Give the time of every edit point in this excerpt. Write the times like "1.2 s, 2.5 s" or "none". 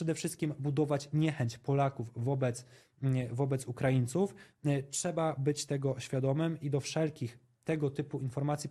none